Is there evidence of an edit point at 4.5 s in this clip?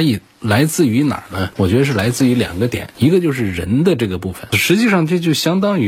yes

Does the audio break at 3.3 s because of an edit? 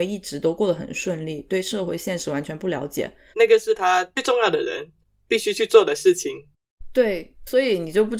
yes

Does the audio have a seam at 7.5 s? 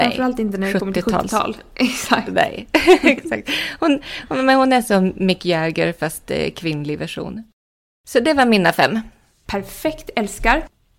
no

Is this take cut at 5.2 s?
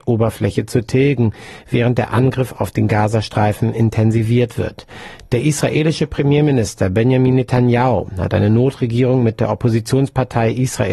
no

